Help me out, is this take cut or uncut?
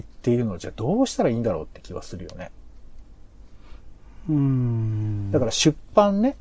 uncut